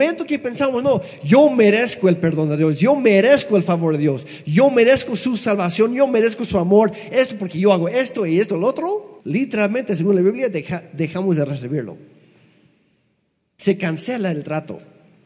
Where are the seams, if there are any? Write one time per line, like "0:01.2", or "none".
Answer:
0:09.2